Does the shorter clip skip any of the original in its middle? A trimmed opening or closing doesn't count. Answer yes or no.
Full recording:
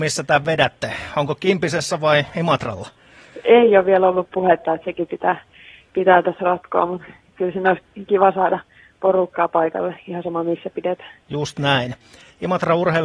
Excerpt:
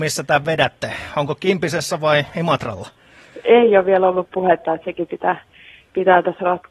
no